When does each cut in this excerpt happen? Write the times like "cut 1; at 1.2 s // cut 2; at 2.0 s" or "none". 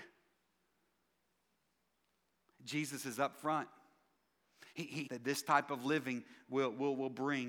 cut 1; at 5.0 s